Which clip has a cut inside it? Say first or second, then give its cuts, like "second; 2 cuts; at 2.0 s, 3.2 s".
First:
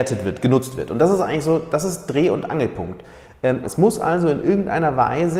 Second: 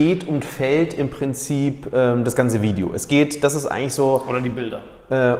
first; 1 cut; at 3.6 s